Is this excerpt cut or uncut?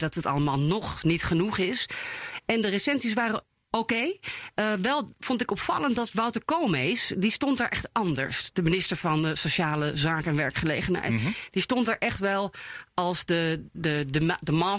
uncut